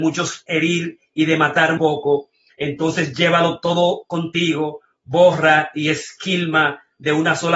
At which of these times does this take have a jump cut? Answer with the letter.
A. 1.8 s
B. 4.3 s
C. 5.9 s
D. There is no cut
A